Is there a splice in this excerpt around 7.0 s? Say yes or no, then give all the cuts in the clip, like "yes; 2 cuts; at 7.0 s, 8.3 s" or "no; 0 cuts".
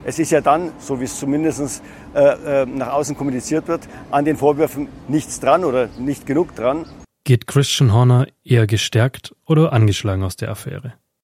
yes; 1 cut; at 7.0 s